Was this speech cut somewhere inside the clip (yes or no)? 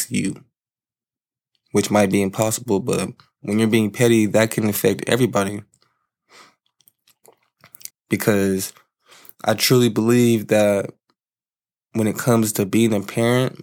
yes